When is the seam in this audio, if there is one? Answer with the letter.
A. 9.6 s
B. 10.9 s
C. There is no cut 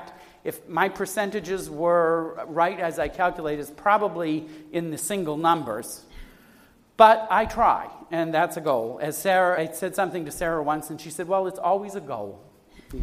A